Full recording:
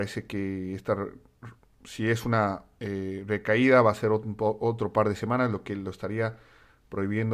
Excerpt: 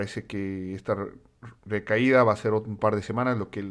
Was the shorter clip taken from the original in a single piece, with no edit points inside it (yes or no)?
no